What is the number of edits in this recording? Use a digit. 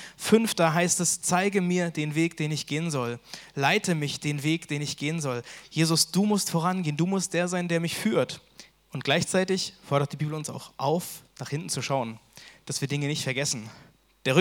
2